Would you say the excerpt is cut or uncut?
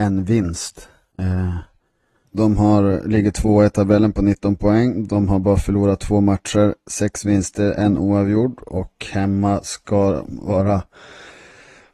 cut